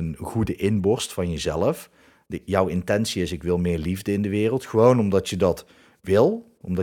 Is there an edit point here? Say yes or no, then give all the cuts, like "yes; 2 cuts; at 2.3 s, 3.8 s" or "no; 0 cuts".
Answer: no; 0 cuts